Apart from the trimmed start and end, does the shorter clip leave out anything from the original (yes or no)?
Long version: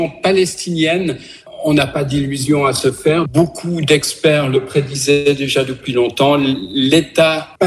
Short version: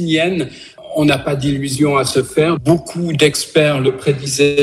no